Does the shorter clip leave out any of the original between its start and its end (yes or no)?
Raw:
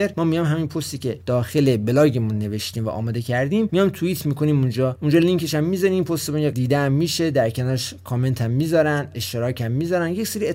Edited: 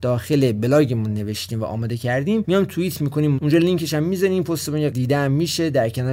yes